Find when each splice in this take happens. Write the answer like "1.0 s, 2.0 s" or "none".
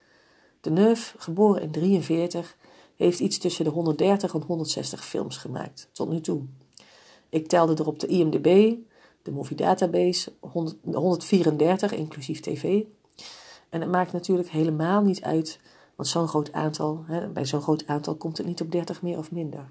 none